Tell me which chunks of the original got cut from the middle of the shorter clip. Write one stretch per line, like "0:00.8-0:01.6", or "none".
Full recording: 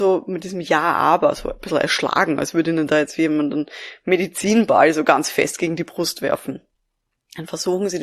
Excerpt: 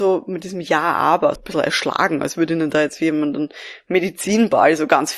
0:01.4-0:01.5